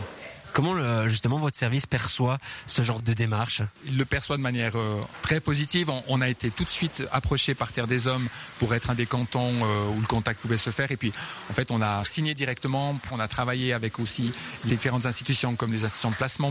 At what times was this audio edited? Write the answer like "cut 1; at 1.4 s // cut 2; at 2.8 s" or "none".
cut 1; at 12.0 s // cut 2; at 13.1 s